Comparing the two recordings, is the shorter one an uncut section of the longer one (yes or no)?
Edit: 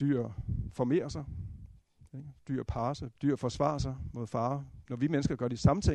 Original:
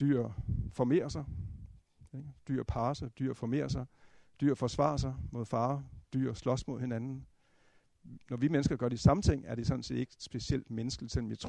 no